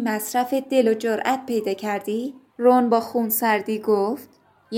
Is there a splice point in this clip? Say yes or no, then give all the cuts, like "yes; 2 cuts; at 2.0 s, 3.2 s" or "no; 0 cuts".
yes; 1 cut; at 2.6 s